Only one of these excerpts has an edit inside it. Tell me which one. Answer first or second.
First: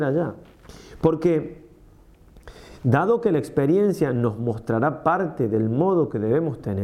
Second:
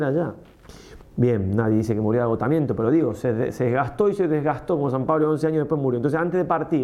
second